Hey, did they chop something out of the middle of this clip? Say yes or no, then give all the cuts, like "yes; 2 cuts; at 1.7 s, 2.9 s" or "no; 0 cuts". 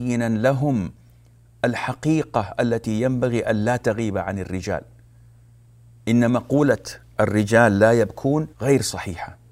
yes; 1 cut; at 8.5 s